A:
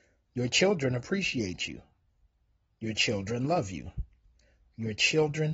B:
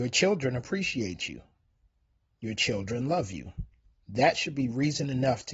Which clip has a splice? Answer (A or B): B